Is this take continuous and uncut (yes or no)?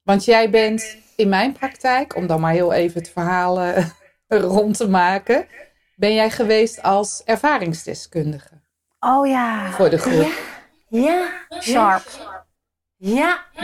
yes